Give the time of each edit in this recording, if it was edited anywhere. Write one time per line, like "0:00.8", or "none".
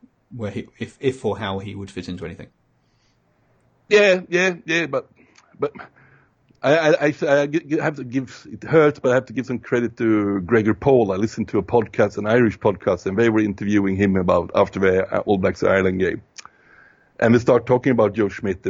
none